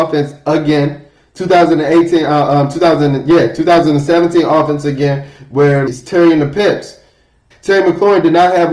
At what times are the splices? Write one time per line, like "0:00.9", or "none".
0:05.9
0:07.5